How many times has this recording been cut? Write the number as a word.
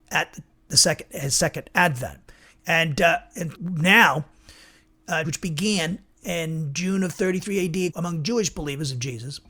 three